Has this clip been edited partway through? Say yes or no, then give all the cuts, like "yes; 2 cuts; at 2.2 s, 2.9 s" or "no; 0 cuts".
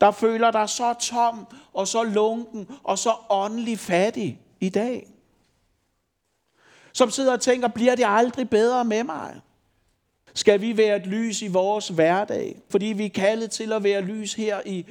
yes; 2 cuts; at 10.3 s, 12.7 s